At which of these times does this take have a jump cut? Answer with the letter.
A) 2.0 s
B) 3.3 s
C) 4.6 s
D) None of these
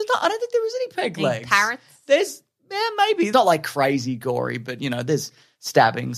B